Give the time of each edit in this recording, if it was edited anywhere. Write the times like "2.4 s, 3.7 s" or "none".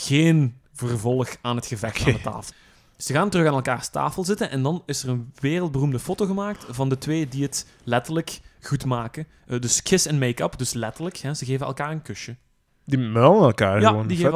2.5 s